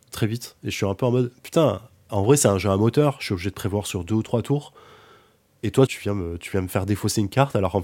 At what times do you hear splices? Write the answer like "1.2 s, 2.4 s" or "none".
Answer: 5.9 s